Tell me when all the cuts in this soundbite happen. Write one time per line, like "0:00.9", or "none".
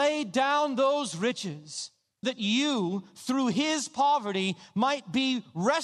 0:02.2

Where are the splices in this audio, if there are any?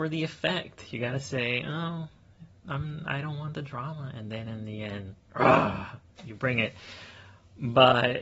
none

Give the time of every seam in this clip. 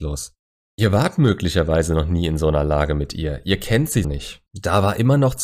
0:04.0

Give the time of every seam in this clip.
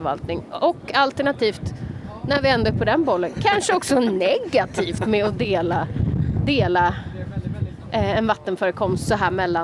0:06.4

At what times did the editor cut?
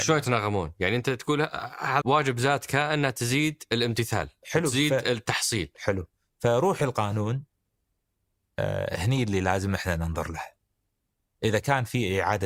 0:02.0

